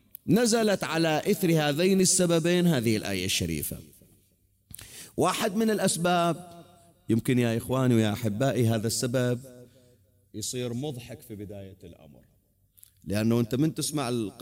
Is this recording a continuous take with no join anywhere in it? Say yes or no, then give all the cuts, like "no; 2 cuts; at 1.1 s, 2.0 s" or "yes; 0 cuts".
yes; 0 cuts